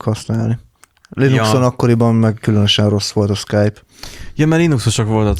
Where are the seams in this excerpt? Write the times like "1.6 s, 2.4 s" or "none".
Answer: none